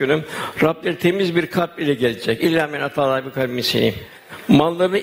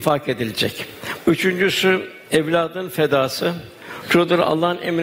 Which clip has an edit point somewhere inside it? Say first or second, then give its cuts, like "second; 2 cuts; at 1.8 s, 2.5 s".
second; 1 cut; at 1.2 s